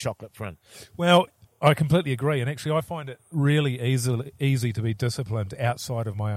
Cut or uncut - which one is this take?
uncut